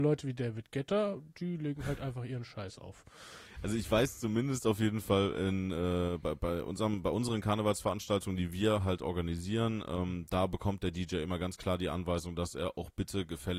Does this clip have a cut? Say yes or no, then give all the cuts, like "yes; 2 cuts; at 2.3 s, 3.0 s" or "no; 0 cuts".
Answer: no; 0 cuts